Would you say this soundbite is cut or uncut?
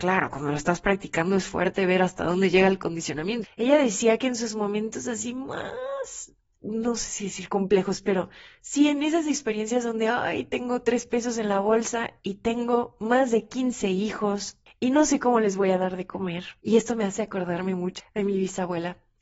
cut